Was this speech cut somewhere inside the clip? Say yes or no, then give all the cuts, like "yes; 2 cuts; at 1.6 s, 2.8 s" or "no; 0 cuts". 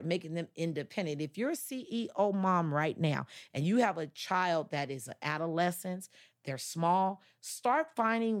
no; 0 cuts